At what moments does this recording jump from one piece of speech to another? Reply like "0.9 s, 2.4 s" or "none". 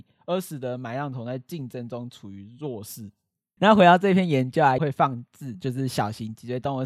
3.6 s, 4.8 s